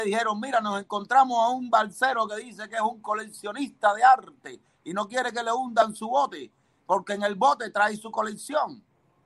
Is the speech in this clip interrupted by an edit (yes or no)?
no